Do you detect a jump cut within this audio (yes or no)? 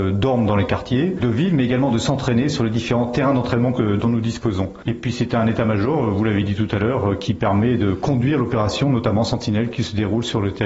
yes